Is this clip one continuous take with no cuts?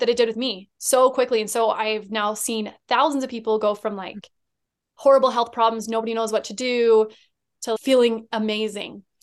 yes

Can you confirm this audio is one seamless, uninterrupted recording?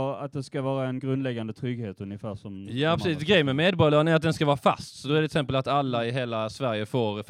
yes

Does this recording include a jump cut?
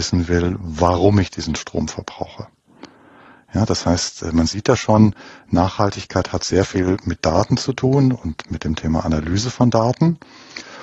no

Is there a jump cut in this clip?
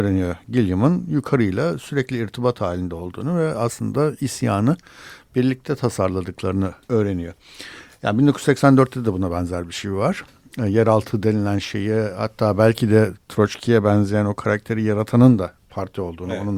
yes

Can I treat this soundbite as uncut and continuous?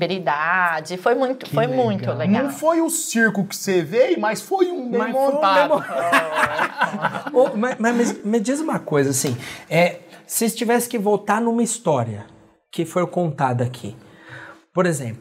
yes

